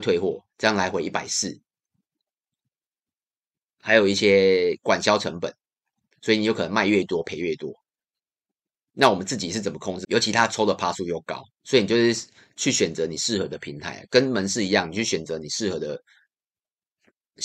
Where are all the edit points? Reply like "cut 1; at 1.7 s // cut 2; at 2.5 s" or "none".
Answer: cut 1; at 6.1 s // cut 2; at 10.0 s // cut 3; at 11.5 s